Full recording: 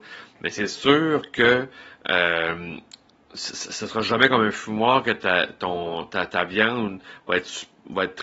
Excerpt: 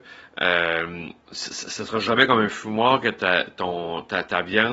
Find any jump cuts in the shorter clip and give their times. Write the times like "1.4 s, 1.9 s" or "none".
1.2 s